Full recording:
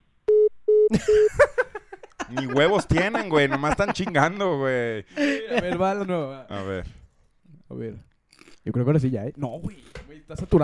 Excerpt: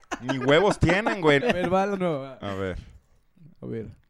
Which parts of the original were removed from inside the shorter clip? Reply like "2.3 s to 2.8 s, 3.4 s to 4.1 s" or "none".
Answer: 3.5 s to 5.5 s

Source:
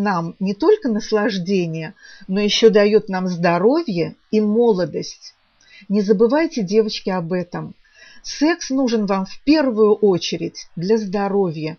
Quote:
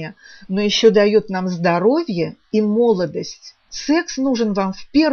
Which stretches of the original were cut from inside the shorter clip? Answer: 5.5 s to 8.2 s

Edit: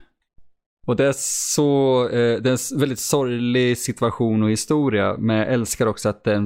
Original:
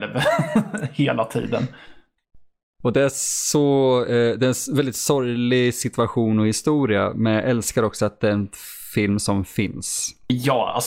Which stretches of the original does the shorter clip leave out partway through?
none

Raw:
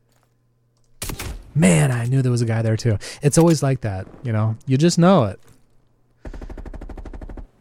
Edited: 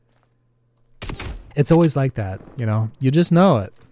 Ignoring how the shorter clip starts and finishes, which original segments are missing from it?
1.5 s to 3.2 s

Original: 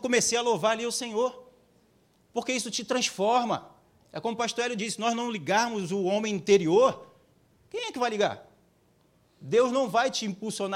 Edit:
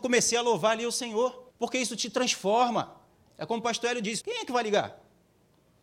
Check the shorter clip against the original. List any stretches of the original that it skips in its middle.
1.5 s to 2.3 s, 5.0 s to 7.7 s

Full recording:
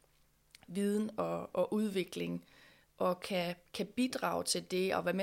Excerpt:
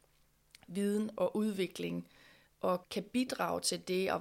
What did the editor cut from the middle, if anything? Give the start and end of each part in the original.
1.2 s to 1.5 s, 3.2 s to 3.7 s

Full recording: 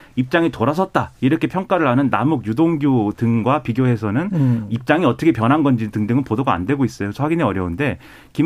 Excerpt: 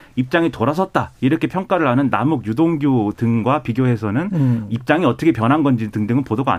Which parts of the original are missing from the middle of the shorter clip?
none

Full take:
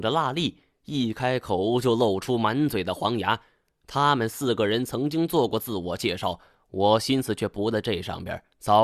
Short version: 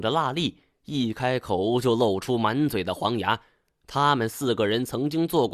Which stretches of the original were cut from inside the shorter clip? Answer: none

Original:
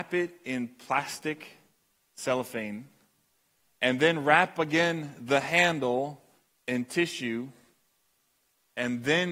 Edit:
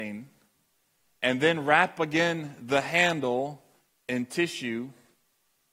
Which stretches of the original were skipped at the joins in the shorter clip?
none

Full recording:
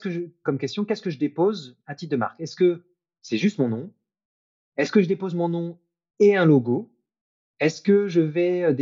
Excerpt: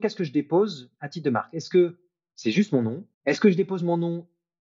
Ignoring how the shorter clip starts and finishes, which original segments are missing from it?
4.0 s to 4.6 s

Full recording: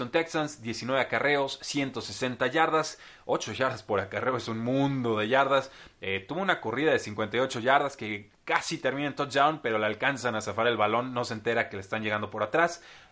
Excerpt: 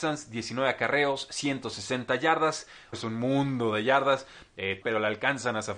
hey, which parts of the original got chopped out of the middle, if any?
3.2 s to 4.4 s, 6.3 s to 9.6 s

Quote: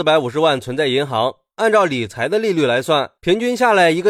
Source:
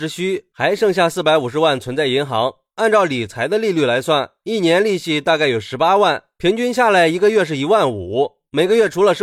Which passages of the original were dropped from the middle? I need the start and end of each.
4.4 s to 6.3 s

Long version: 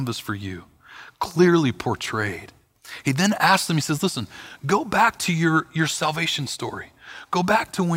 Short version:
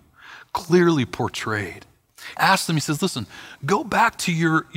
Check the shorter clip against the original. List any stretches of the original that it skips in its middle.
3.0 s to 3.4 s

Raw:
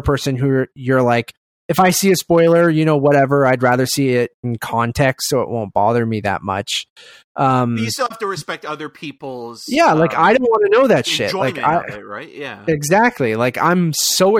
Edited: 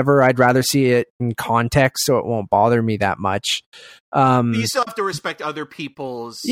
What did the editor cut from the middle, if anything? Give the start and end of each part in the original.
none

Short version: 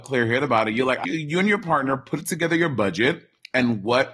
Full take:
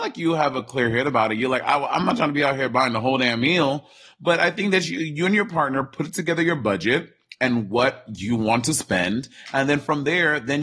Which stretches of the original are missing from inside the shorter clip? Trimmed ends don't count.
1.7 s to 4.9 s

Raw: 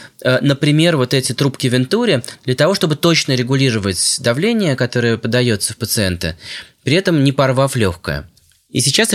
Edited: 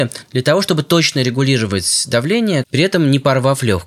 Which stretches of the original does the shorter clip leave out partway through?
4.8 s to 6.8 s

